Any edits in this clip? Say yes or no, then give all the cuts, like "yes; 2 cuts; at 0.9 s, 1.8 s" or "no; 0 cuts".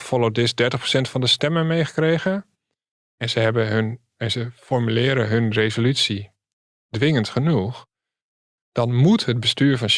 yes; 1 cut; at 3.1 s